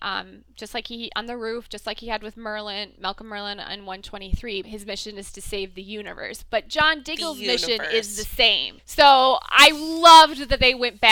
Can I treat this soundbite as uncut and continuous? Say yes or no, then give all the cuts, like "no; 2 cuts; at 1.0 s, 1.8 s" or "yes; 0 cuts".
no; 2 cuts; at 4.6 s, 8.8 s